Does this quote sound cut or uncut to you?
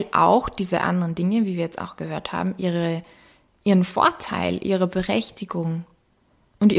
uncut